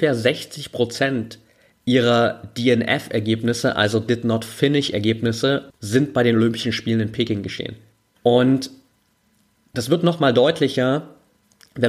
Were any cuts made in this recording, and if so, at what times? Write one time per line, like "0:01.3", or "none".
0:05.7
0:08.2